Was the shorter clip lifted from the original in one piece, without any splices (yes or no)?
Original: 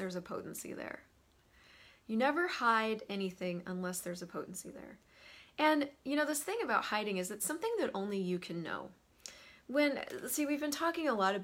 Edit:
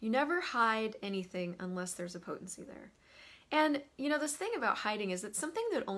yes